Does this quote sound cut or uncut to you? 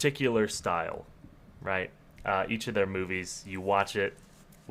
uncut